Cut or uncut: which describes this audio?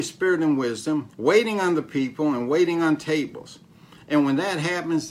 cut